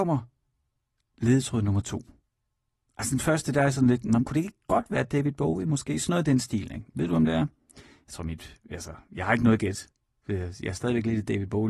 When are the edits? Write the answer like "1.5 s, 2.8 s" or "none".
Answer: 4.2 s, 6.9 s